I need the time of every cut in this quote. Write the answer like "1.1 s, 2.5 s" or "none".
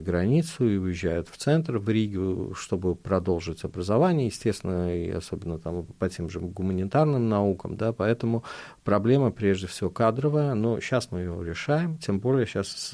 5.9 s